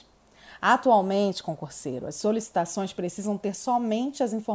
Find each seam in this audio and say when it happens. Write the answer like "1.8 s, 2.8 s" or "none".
none